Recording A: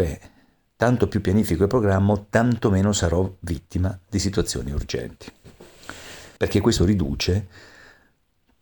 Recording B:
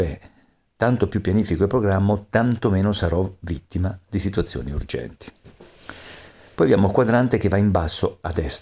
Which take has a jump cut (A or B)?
A